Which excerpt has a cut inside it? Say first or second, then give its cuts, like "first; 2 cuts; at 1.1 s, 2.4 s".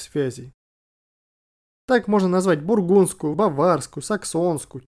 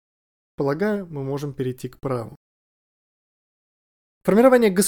first; 2 cuts; at 1.7 s, 3.3 s